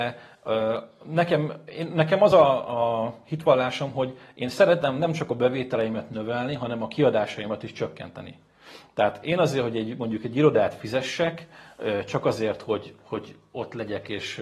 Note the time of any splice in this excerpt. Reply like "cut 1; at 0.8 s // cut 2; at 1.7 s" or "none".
none